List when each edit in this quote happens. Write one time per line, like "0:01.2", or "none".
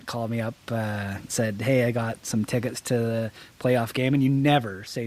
0:01.3